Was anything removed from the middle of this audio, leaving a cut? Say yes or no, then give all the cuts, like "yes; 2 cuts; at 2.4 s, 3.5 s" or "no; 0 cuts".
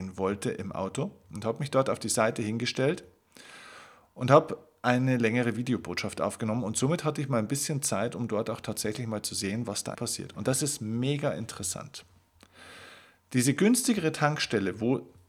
yes; 1 cut; at 10.0 s